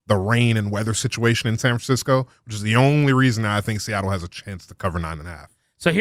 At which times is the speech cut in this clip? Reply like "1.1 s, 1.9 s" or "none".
none